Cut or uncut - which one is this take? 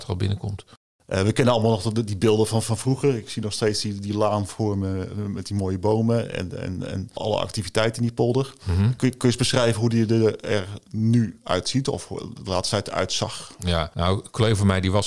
uncut